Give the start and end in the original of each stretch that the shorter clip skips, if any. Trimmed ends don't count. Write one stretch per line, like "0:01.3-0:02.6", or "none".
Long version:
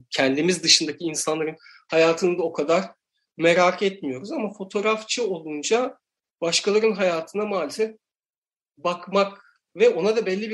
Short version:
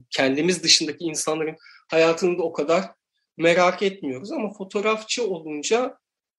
none